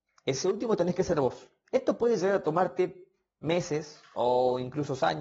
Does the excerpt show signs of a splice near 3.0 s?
no; 1 cut; at 1.6 s

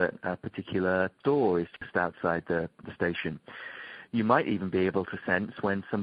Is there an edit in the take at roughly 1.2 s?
yes; 1 cut; at 1.2 s

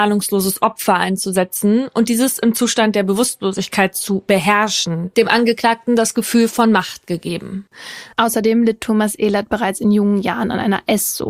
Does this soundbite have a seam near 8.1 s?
yes; 1 cut; at 8.1 s

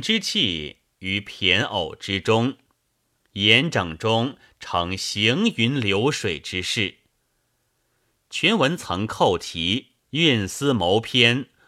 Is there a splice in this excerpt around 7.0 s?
no; 2 cuts; at 8.8 s, 10.0 s

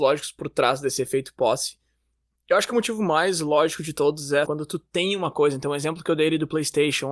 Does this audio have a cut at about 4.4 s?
yes; 1 cut; at 4.4 s

